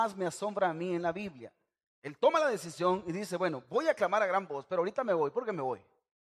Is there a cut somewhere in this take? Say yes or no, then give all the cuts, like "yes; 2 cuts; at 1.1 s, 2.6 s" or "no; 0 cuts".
yes; 1 cut; at 1.9 s